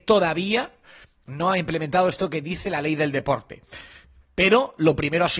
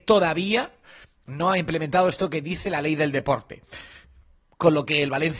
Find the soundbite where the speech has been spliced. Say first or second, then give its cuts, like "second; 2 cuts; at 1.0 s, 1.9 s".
first; 1 cut; at 4.2 s